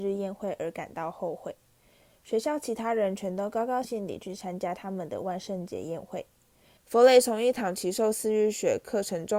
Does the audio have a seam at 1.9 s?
no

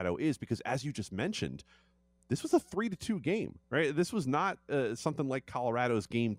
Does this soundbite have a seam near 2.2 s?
no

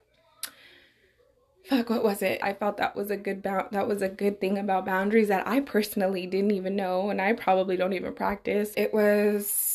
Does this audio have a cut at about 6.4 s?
no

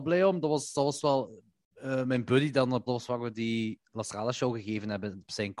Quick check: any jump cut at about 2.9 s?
yes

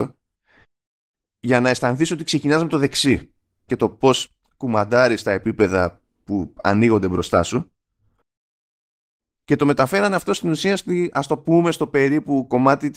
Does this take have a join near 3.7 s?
yes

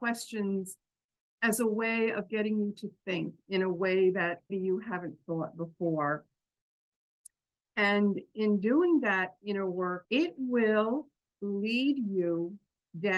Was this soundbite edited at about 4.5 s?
yes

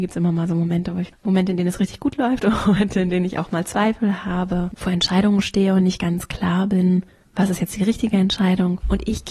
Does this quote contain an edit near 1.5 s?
no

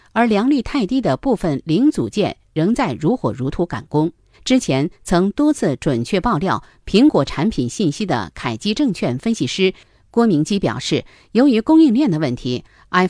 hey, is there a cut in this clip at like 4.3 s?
yes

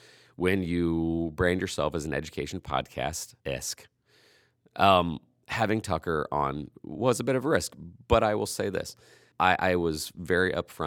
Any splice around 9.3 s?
yes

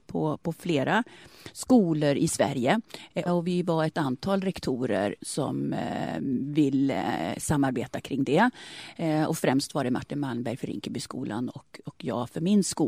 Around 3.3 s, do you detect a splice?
yes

